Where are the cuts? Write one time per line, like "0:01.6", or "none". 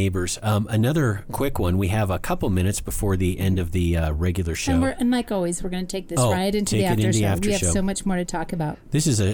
none